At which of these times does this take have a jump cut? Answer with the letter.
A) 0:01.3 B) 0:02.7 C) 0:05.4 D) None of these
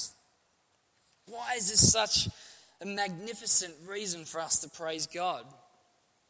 A